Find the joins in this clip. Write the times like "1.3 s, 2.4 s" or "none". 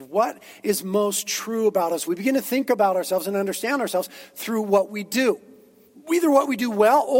2.1 s